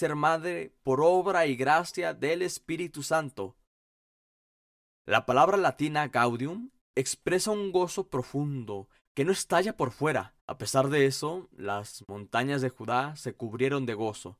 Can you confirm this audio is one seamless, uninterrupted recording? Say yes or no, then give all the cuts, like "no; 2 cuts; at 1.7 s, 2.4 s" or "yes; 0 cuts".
no; 2 cuts; at 9.1 s, 10.4 s